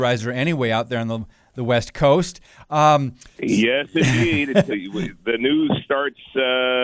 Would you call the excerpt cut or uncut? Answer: cut